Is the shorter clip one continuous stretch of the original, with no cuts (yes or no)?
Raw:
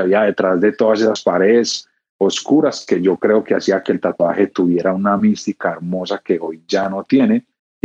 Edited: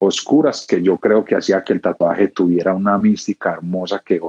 yes